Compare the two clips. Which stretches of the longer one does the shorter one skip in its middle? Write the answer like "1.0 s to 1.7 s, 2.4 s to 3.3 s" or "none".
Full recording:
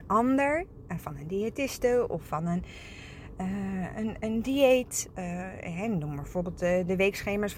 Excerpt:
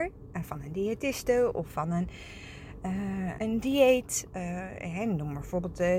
3.9 s to 4.2 s